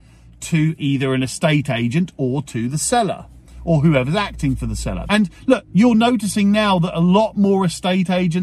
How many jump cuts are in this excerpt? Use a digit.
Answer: 1